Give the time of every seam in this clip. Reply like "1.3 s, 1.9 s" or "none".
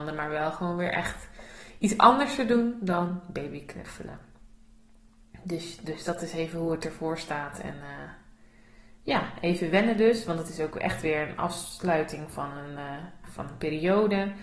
13.2 s